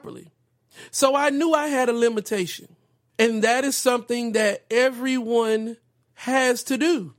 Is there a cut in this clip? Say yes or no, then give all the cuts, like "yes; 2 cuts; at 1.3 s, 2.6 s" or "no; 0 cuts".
yes; 1 cut; at 3.1 s